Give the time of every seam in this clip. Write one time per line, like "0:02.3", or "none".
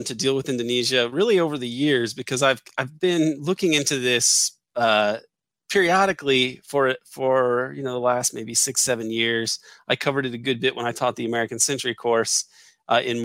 none